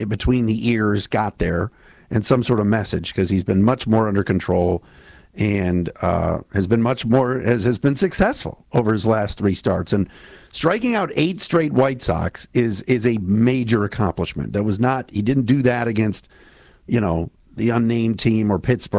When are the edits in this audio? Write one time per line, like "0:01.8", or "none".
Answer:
none